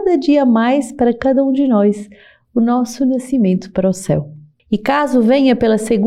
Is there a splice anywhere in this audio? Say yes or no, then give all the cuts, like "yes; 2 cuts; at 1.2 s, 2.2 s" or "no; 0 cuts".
yes; 1 cut; at 4.6 s